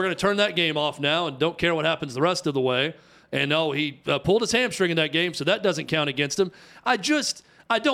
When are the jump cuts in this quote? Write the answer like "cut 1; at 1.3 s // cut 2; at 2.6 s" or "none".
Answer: none